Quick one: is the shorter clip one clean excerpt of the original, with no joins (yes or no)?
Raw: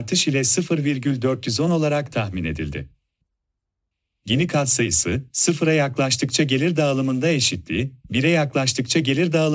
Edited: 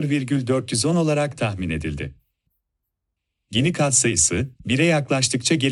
no